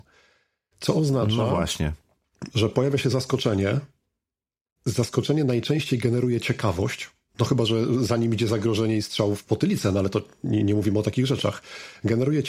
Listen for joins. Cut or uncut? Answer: uncut